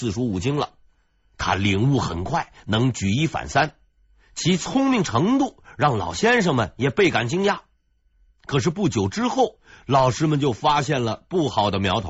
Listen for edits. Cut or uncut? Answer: uncut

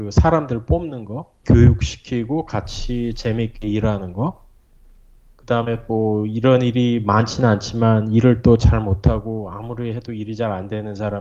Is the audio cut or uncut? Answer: cut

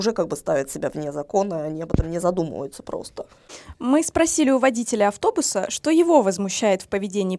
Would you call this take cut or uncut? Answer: uncut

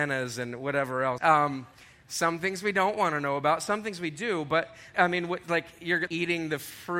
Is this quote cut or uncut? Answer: cut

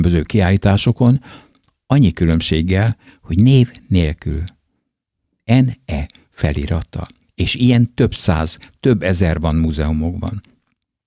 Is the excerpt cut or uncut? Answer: uncut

